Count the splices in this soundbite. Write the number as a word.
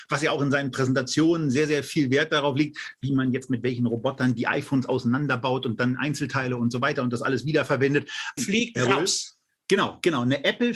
one